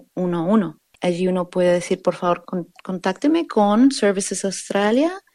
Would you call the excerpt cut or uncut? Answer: cut